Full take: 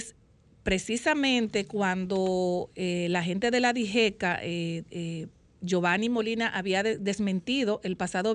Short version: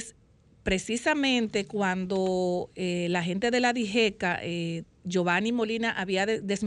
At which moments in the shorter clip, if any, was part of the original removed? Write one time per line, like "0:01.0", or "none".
0:04.8